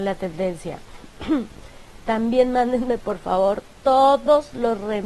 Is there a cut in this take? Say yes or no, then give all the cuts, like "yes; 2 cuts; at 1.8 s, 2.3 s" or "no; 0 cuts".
no; 0 cuts